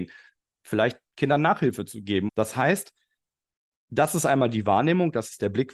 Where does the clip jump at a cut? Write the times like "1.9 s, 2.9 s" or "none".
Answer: 2.3 s